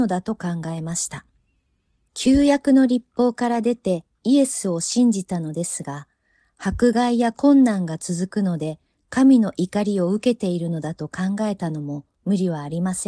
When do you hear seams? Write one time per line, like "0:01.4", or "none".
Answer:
0:02.1